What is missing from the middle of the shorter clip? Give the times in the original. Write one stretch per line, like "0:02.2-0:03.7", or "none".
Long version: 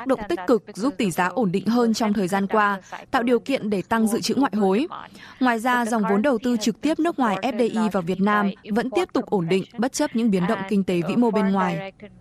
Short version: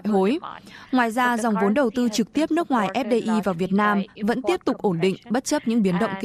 none